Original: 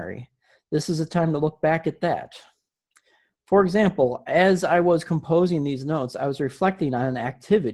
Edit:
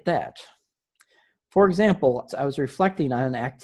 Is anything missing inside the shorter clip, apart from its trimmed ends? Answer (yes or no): yes